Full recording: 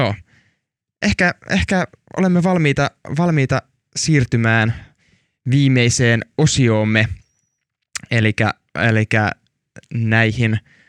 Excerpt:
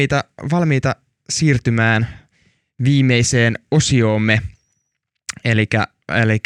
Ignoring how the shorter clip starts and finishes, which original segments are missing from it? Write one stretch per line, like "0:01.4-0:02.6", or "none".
none